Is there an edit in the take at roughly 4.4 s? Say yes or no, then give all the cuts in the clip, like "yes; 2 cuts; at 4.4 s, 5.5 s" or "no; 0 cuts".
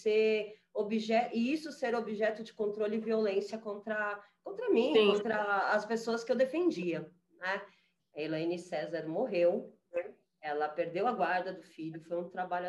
no; 1 cut; at 8.0 s